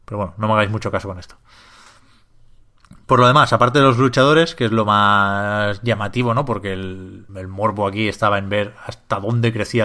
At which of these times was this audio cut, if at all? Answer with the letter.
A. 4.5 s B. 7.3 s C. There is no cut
B